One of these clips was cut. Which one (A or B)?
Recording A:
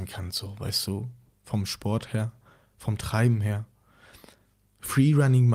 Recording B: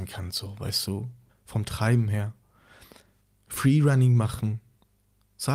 B